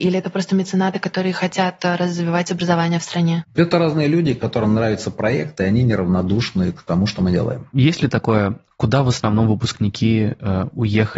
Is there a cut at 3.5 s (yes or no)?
no